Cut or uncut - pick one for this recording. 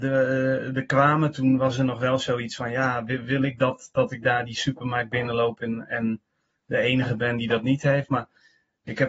uncut